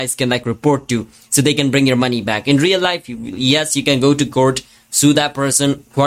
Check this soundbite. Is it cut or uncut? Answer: uncut